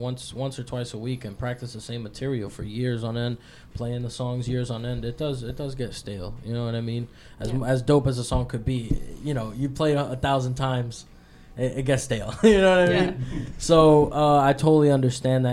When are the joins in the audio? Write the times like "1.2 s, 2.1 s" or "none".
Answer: none